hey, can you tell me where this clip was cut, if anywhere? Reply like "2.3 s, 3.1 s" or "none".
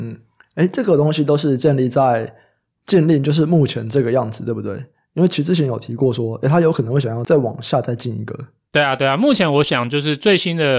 none